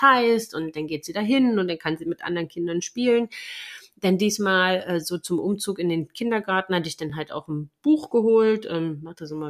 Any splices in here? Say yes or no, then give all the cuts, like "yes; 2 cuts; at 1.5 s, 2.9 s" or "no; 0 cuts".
no; 0 cuts